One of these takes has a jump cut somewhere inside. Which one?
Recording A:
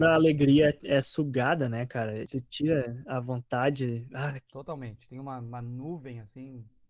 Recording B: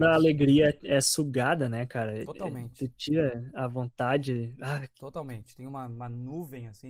A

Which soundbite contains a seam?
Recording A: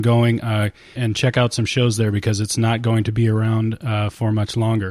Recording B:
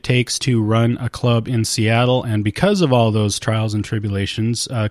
A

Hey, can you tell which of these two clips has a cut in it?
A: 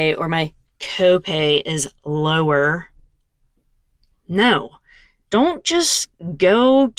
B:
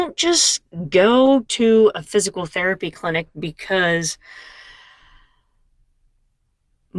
A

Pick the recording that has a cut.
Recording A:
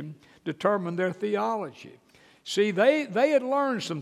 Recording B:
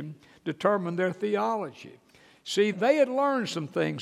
B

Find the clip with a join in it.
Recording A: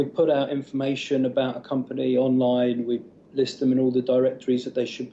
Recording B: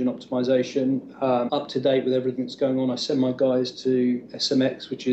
B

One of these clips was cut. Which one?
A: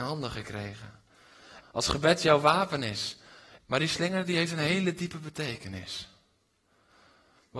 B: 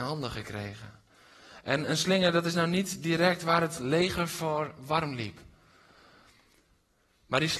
A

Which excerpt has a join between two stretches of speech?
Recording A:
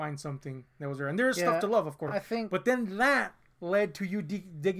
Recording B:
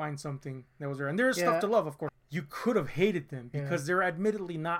B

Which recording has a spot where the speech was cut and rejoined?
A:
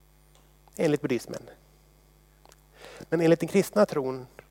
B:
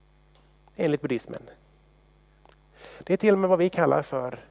B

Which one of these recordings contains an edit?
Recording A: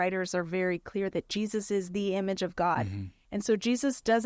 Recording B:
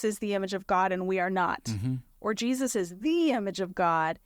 A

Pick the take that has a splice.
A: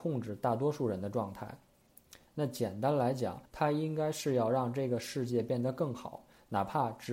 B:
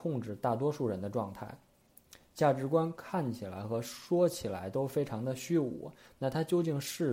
A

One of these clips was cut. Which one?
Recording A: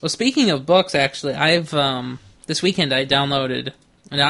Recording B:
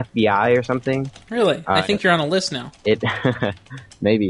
B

